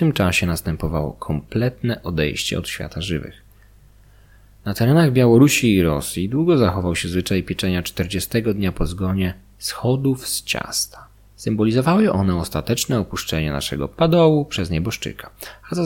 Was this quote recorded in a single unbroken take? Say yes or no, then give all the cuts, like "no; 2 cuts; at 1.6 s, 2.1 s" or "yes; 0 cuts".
yes; 0 cuts